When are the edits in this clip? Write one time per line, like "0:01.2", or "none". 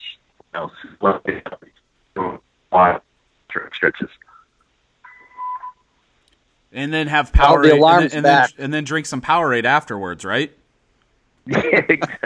none